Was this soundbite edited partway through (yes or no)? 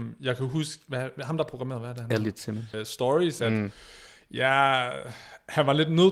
yes